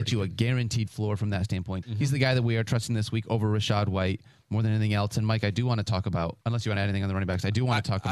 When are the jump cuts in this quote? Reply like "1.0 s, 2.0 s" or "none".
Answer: 1.8 s, 6.4 s